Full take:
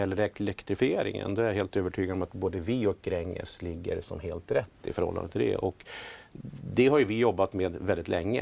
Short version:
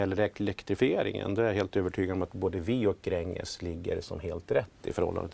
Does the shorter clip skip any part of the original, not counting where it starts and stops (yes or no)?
no